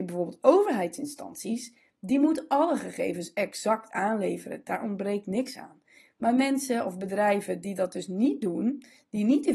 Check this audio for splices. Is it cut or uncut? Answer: uncut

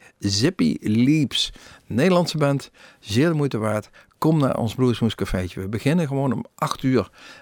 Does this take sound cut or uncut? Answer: uncut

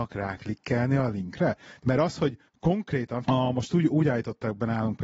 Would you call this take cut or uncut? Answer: cut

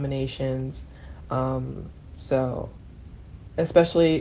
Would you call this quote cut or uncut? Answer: uncut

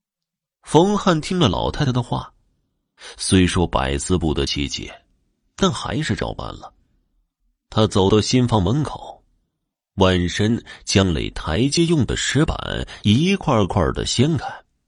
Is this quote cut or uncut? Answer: uncut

